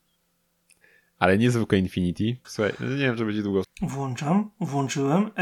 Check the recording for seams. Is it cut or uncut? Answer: cut